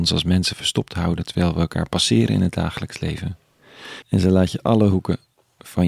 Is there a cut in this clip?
yes; 1 cut; at 4.0 s

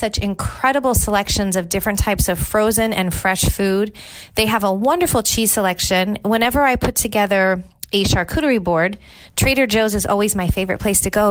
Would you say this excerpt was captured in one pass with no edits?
yes; 0 cuts

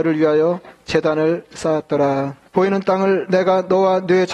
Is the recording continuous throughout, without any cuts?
no; 1 cut; at 2.5 s

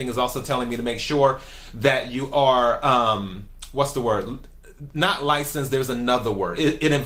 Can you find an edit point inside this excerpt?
no; 0 cuts

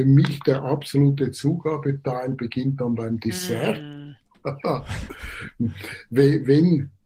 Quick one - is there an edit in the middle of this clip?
no; 0 cuts

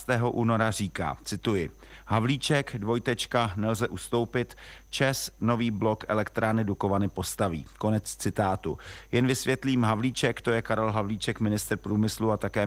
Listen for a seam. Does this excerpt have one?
no; 0 cuts

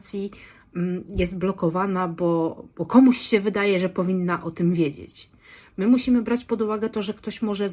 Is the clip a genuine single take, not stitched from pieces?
yes; 0 cuts

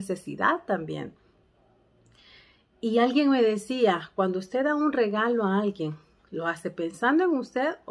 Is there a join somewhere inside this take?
no; 0 cuts

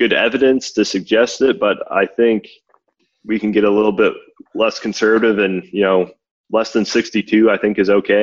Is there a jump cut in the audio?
no; 0 cuts

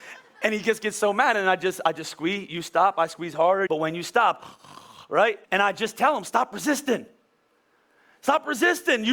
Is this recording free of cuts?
no; 2 cuts; at 3.7 s, 5.4 s

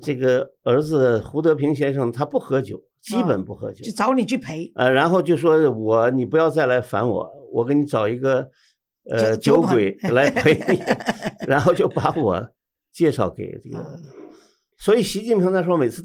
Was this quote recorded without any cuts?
yes; 0 cuts

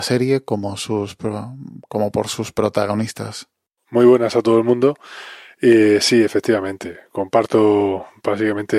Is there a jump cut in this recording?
no; 0 cuts

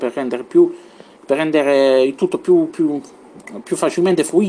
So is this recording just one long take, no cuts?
yes; 0 cuts

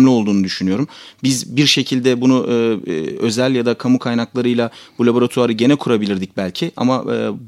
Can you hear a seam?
no; 0 cuts

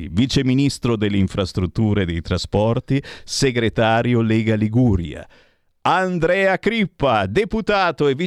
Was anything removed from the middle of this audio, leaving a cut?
no; 0 cuts

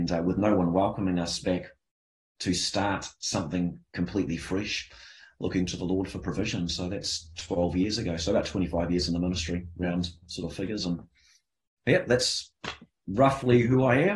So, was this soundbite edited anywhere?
no; 0 cuts

